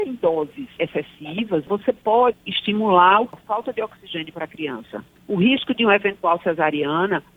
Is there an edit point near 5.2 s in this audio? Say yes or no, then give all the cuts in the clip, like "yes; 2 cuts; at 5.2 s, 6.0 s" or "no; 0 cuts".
yes; 2 cuts; at 2.3 s, 5.2 s